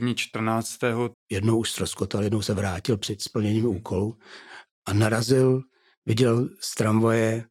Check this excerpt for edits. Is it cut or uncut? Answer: cut